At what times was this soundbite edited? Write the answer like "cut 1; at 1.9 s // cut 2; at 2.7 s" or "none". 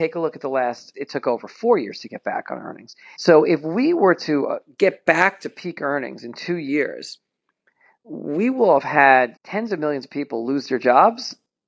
cut 1; at 0.9 s // cut 2; at 3.1 s // cut 3; at 9.4 s